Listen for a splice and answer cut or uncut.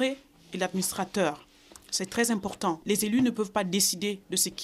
uncut